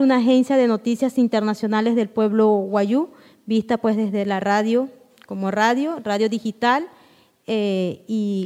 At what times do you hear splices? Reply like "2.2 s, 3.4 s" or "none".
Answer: none